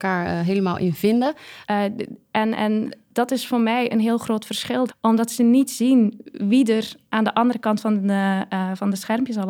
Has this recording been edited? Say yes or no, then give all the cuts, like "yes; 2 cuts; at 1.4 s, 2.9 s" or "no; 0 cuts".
yes; 2 cuts; at 1.6 s, 4.9 s